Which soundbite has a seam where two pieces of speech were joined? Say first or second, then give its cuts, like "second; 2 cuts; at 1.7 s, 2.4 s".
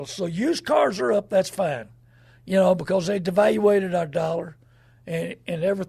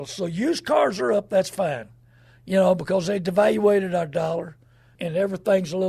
second; 1 cut; at 5.0 s